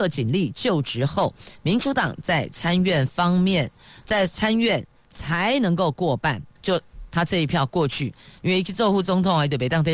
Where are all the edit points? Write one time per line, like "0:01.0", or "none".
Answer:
0:06.6